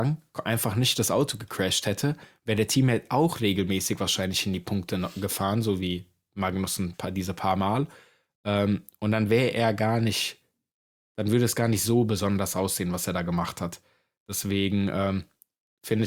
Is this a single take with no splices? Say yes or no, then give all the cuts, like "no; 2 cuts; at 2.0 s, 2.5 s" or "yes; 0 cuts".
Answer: yes; 0 cuts